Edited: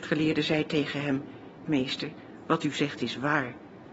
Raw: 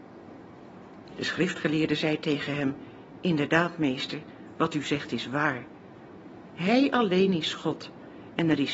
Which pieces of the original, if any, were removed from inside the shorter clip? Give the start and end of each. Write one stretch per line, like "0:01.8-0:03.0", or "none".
0:03.2-0:03.8